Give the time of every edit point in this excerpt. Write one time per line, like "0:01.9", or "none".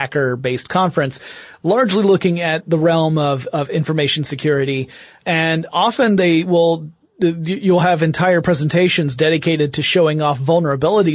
0:02.7
0:05.2